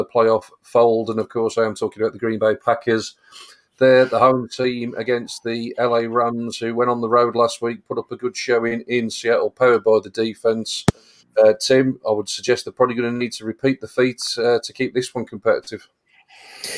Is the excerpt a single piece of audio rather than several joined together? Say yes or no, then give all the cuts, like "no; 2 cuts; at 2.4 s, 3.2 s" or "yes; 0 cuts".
yes; 0 cuts